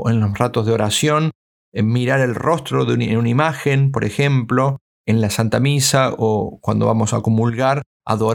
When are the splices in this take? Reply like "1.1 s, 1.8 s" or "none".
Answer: none